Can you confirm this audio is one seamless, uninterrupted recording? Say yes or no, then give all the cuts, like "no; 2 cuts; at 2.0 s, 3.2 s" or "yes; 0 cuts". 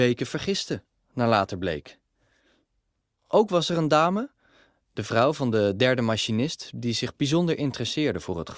yes; 0 cuts